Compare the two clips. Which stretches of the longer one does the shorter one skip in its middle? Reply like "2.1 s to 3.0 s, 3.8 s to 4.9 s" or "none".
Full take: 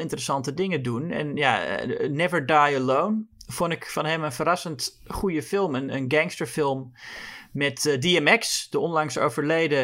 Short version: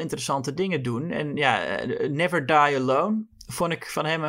none